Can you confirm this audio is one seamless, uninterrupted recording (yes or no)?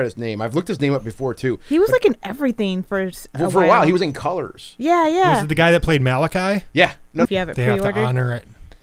no